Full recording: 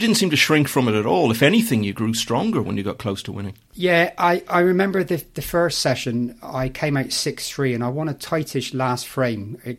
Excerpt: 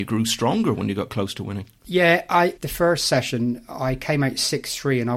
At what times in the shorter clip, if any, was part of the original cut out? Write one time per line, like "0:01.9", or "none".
0:02.6